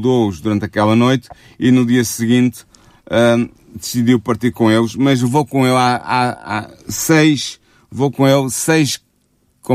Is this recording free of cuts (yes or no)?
yes